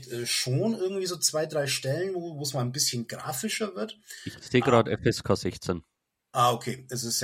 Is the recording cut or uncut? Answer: uncut